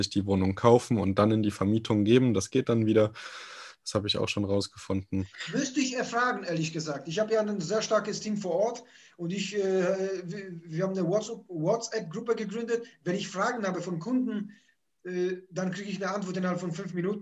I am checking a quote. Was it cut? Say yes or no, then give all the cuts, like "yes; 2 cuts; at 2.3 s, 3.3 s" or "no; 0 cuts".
no; 0 cuts